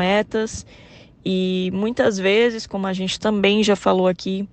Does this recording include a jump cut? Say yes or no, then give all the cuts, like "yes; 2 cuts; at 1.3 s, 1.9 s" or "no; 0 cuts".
no; 0 cuts